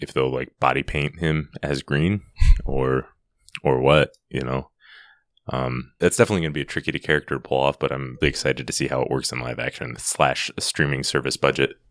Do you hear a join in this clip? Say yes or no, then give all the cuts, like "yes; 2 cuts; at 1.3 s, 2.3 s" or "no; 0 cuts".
yes; 3 cuts; at 6.0 s, 8.2 s, 10.0 s